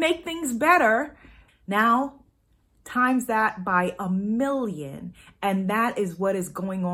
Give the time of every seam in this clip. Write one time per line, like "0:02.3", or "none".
0:01.5